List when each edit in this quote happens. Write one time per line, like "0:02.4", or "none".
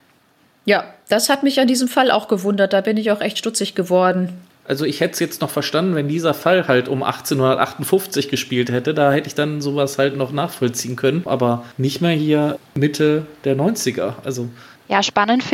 0:11.3